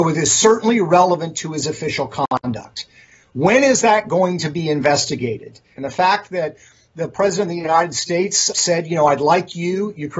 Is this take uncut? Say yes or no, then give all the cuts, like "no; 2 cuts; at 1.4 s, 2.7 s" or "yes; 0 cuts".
no; 2 cuts; at 5.8 s, 8.5 s